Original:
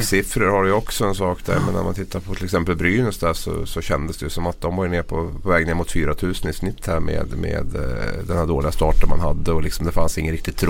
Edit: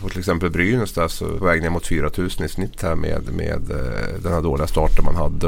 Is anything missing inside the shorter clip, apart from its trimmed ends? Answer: yes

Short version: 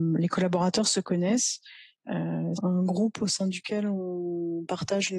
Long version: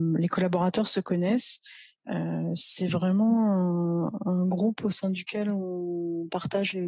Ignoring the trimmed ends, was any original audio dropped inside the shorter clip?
yes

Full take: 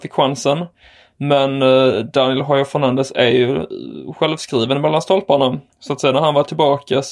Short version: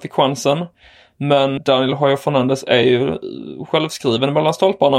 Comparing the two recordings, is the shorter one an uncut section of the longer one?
no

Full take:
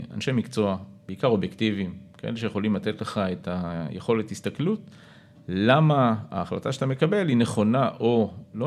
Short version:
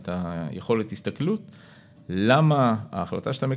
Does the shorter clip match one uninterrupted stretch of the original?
yes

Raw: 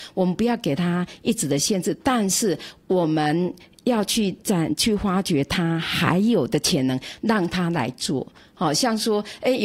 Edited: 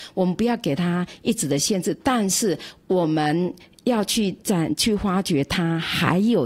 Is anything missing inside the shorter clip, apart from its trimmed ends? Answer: no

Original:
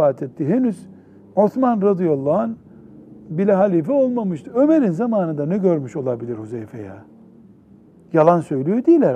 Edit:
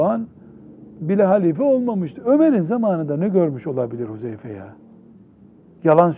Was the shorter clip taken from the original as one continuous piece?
yes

